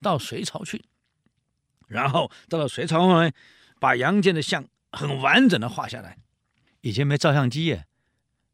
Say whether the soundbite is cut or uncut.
uncut